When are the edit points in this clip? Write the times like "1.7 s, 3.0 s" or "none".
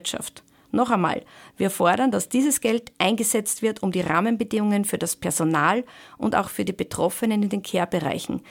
none